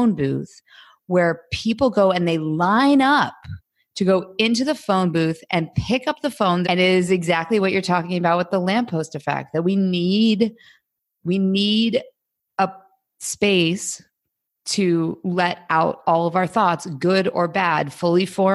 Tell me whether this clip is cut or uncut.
cut